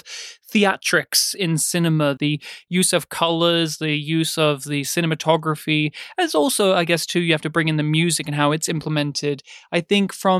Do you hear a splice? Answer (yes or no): yes